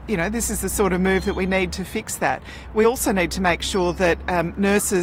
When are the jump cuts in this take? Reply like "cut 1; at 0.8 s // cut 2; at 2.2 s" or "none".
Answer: none